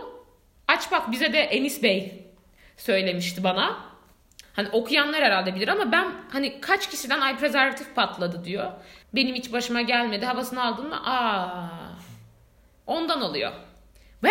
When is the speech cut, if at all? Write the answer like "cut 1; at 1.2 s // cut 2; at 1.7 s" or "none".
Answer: cut 1; at 4.4 s // cut 2; at 9.0 s